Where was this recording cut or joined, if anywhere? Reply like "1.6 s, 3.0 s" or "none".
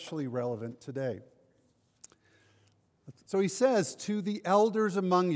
3.3 s